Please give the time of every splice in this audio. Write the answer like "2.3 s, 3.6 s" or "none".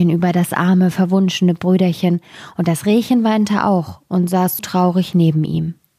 4.6 s